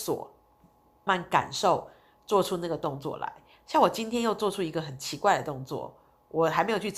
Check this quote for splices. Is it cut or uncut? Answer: cut